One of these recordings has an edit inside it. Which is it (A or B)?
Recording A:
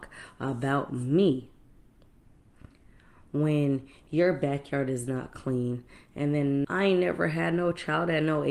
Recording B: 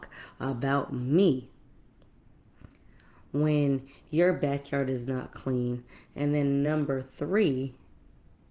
A